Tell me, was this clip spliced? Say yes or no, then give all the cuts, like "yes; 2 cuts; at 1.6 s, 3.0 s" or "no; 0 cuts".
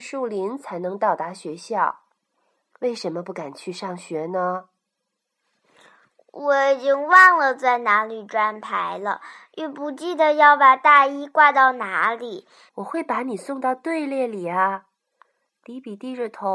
yes; 1 cut; at 12.7 s